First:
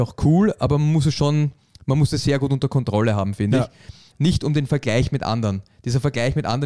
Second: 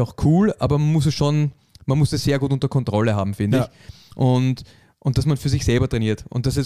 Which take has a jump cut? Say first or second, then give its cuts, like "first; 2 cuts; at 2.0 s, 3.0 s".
first; 1 cut; at 4.1 s